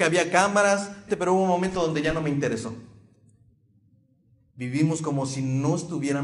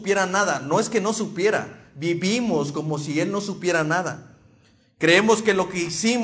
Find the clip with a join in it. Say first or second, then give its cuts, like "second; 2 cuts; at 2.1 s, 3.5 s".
first; 1 cut; at 1.1 s